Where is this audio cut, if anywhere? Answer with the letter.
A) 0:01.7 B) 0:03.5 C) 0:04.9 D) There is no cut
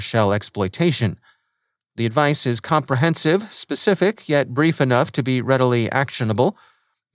D